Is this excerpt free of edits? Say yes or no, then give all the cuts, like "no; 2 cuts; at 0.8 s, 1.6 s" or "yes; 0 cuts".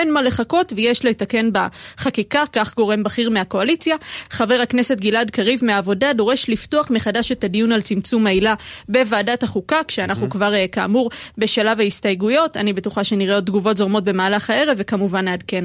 yes; 0 cuts